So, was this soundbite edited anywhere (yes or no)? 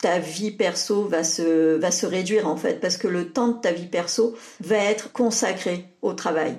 no